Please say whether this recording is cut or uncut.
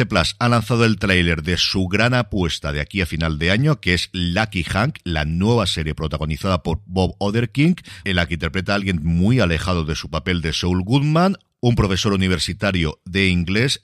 uncut